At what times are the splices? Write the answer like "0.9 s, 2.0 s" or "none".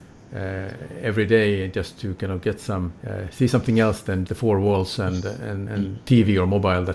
3.0 s, 4.3 s, 5.7 s